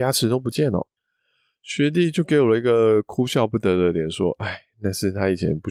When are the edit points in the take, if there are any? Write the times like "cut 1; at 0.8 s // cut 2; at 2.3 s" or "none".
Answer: cut 1; at 1.0 s